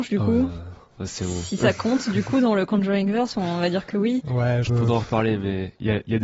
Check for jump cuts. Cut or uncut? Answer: cut